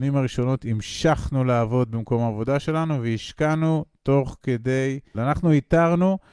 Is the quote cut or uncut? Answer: cut